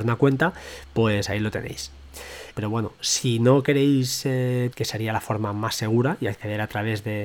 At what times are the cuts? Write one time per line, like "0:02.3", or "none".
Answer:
0:02.5
0:04.7